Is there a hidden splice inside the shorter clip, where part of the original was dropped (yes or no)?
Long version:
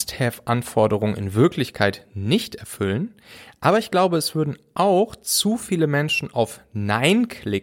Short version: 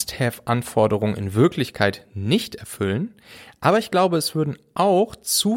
no